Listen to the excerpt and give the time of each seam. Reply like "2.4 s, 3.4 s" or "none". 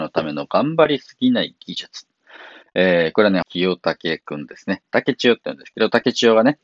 3.4 s

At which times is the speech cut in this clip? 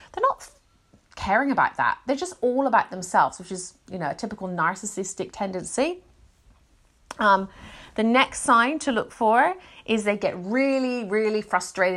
none

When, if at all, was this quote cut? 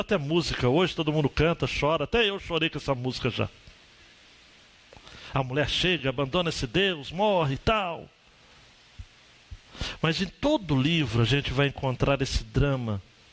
none

